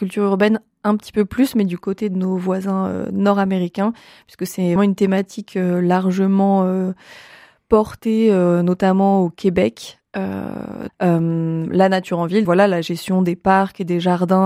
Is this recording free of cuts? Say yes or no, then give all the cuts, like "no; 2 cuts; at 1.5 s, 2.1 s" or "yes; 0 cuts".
no; 3 cuts; at 4.8 s, 10.9 s, 12.4 s